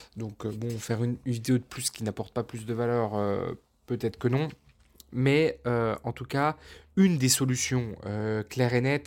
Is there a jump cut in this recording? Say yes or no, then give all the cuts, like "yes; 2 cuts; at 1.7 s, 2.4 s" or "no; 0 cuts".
no; 0 cuts